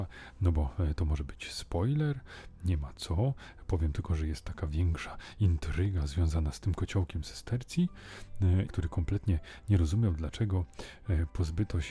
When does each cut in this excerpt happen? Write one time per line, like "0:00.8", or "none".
0:08.7